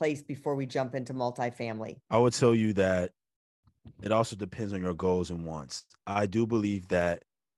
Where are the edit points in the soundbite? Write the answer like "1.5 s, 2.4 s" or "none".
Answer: none